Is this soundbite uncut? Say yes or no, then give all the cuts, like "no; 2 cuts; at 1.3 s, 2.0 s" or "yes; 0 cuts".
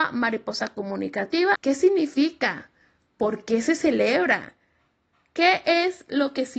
no; 1 cut; at 1.5 s